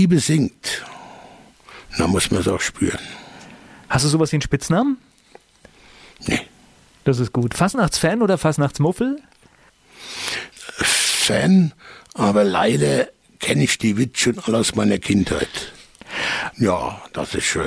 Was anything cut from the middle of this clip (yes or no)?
yes